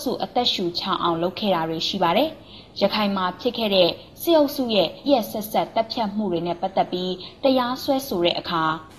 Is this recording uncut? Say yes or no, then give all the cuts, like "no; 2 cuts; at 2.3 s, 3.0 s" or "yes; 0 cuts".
no; 1 cut; at 5.1 s